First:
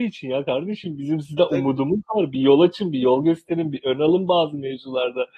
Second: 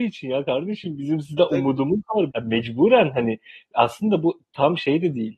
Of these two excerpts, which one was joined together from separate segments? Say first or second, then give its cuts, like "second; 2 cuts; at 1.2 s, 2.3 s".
second; 1 cut; at 2.3 s